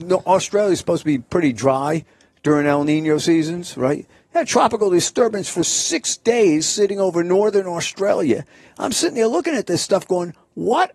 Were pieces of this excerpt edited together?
no; 0 cuts

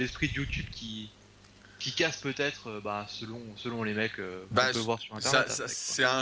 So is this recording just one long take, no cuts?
yes; 0 cuts

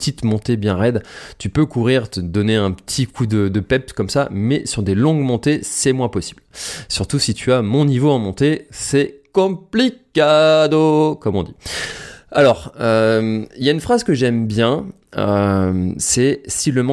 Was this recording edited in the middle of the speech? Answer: no; 0 cuts

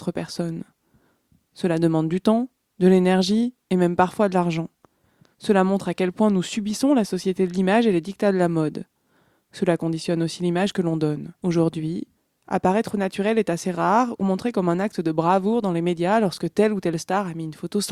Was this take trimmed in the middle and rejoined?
yes; 2 cuts; at 11.4 s, 14.2 s

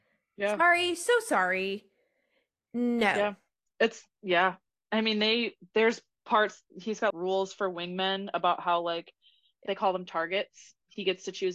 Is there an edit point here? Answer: yes; 2 cuts; at 7.1 s, 9.7 s

